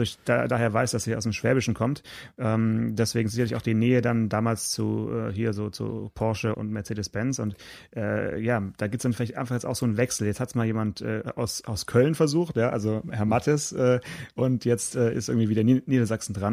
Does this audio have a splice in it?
yes; 1 cut; at 6.5 s

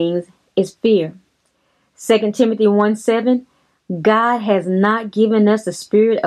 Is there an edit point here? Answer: no; 0 cuts

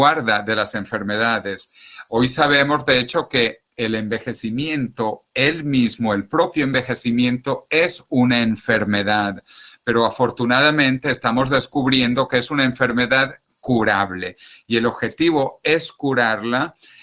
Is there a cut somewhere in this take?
no; 0 cuts

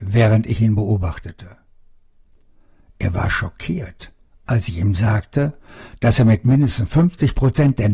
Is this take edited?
yes; 1 cut; at 2.8 s

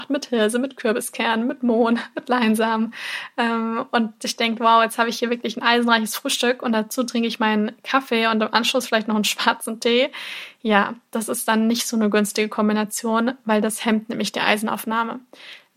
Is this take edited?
no; 0 cuts

